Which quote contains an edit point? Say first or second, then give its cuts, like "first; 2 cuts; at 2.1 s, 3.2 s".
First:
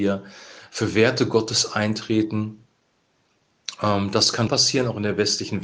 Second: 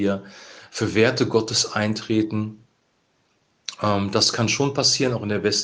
first; 1 cut; at 4.5 s